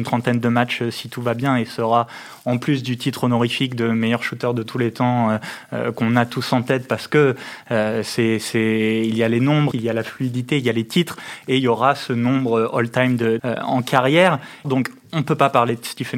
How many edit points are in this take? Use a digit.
3